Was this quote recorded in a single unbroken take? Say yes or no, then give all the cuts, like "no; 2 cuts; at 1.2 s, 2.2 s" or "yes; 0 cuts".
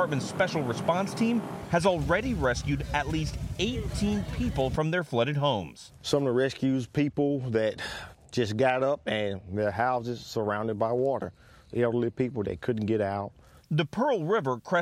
yes; 0 cuts